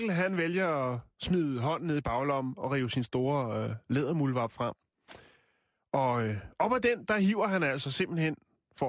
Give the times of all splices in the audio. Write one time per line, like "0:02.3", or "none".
none